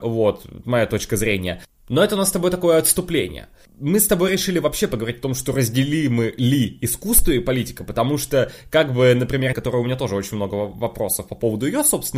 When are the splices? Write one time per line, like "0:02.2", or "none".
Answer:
0:09.5